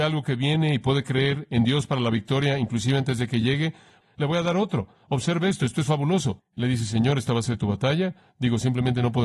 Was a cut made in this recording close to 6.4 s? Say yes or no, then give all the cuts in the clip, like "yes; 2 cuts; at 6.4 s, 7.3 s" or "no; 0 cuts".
yes; 1 cut; at 6.4 s